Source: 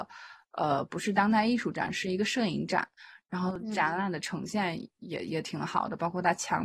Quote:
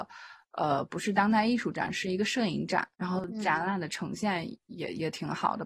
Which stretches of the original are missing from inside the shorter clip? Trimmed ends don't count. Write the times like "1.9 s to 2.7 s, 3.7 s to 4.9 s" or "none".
2.9 s to 3.2 s